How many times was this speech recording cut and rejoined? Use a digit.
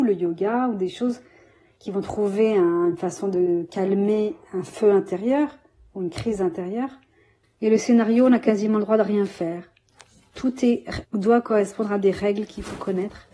2